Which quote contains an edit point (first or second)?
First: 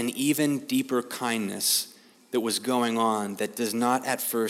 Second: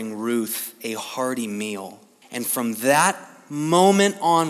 second